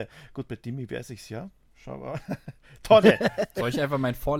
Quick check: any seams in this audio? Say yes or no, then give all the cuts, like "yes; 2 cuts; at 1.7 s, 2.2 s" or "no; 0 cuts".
no; 0 cuts